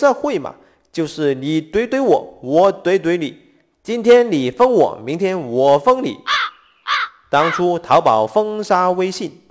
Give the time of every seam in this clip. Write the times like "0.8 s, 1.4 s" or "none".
none

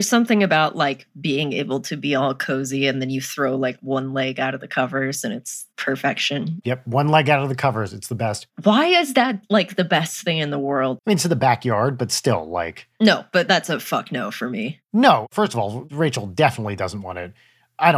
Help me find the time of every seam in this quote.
11.0 s

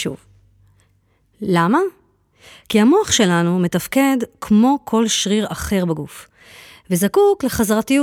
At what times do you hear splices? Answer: none

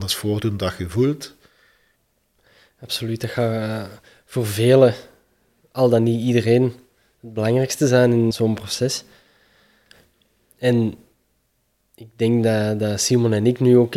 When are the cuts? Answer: 8.3 s

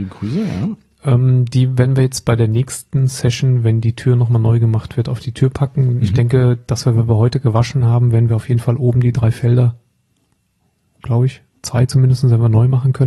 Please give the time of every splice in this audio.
none

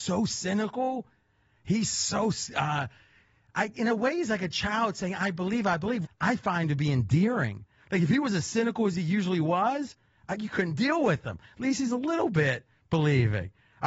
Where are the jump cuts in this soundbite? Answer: 6.0 s

